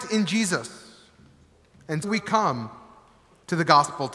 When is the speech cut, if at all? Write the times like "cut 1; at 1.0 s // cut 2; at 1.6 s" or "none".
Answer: cut 1; at 2.0 s